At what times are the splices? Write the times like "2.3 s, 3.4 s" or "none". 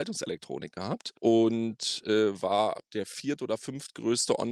1.2 s